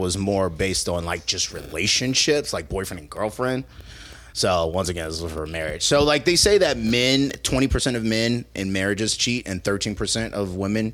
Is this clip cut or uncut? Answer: uncut